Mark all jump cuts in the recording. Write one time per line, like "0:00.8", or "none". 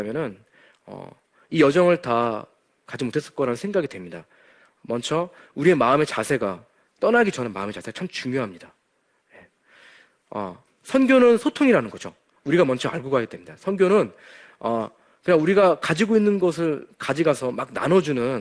none